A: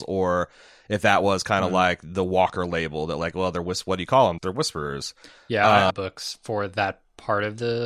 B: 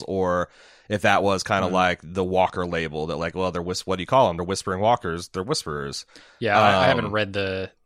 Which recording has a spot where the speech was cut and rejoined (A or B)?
A